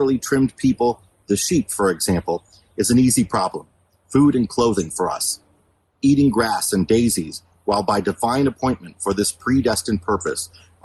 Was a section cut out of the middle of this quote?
no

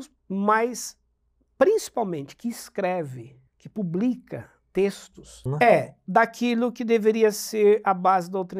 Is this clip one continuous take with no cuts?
no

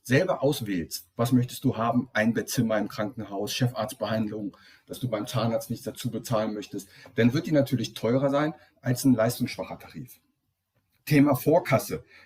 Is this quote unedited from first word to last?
yes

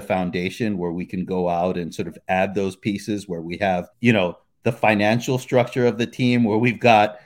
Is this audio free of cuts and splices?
no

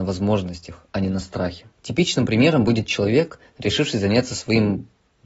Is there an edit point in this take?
yes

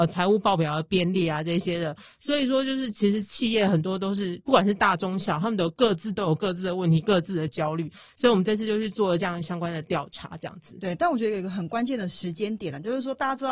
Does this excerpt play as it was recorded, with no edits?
yes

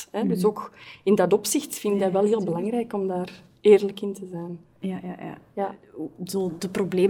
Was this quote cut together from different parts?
no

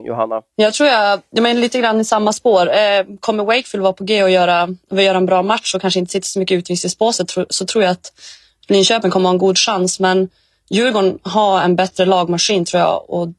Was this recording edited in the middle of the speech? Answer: no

